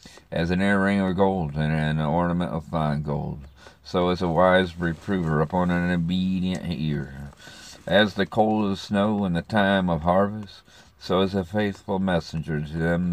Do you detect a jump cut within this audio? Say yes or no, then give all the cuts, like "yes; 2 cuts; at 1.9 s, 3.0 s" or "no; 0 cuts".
no; 0 cuts